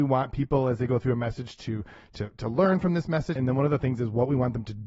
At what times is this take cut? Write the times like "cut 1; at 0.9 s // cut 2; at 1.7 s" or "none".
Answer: cut 1; at 3.4 s